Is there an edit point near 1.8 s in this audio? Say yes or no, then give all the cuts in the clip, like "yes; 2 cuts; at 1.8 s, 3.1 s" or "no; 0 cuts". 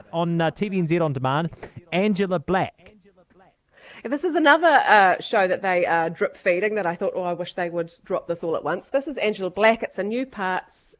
no; 0 cuts